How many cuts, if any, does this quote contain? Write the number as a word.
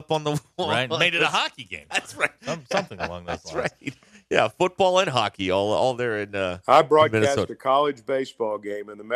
one